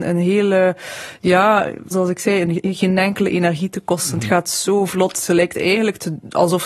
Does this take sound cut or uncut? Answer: cut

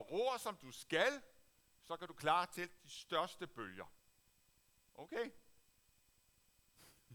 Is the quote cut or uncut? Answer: uncut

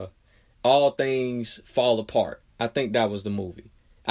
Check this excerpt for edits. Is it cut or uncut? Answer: uncut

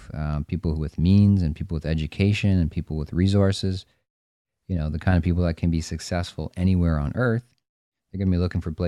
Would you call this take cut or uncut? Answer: uncut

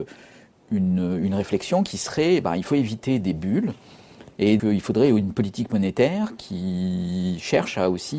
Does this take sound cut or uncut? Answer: cut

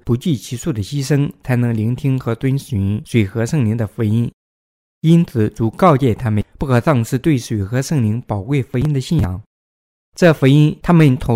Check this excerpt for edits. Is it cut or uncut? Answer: uncut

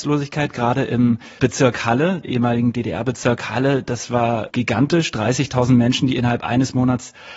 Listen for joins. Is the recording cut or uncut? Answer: uncut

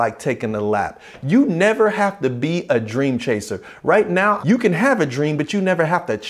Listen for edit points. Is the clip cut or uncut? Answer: cut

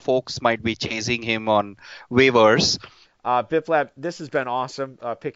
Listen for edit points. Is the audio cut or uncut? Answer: cut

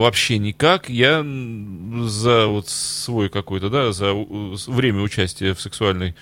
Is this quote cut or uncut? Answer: uncut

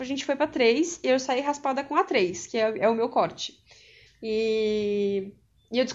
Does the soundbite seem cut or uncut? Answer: cut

